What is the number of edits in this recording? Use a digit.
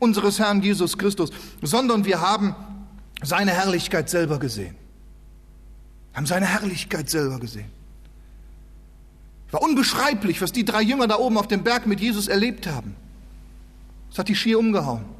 0